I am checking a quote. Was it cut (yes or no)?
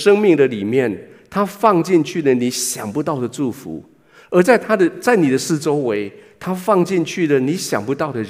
no